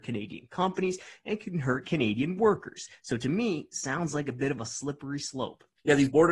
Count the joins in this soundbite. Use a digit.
0